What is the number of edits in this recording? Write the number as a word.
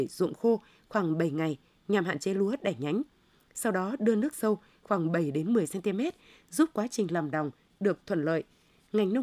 zero